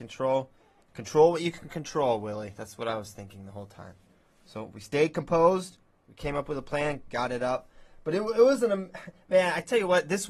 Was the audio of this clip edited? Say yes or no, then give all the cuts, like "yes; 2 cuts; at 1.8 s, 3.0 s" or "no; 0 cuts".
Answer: no; 0 cuts